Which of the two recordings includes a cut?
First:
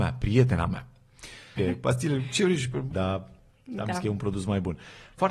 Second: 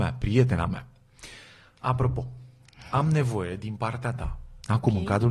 first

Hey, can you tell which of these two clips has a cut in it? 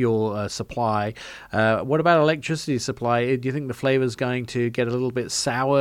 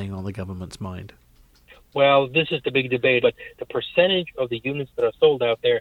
second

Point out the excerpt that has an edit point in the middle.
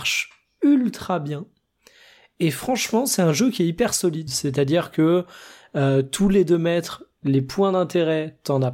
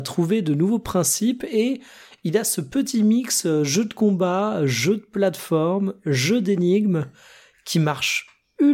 first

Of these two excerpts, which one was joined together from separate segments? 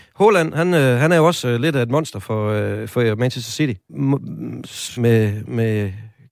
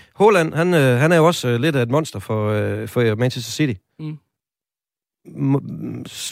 first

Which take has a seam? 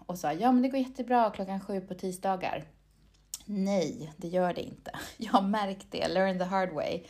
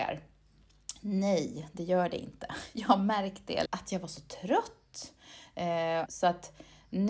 second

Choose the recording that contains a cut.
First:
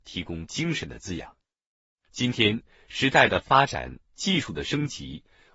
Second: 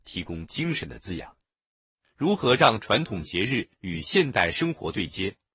first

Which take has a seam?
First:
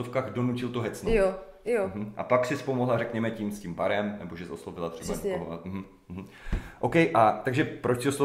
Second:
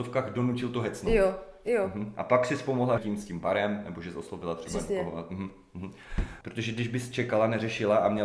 second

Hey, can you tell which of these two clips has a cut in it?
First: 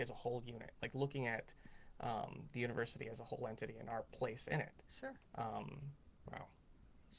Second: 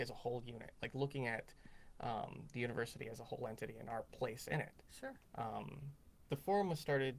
first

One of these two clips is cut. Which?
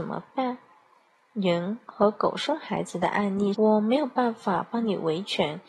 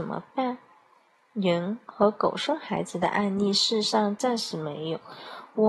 first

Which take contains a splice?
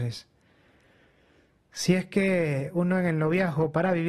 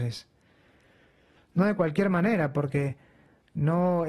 second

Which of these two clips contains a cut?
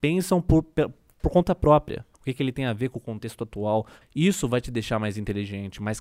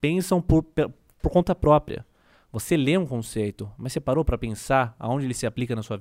first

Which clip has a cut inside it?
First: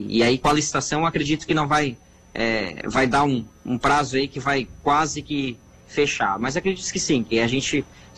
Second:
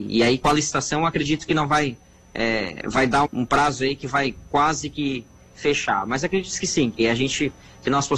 second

